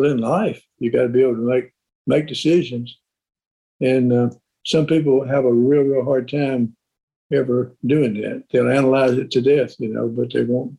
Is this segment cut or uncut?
uncut